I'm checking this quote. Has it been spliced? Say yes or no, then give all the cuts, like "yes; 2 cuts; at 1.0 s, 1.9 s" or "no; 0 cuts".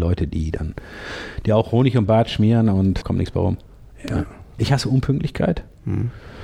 yes; 2 cuts; at 3.0 s, 4.6 s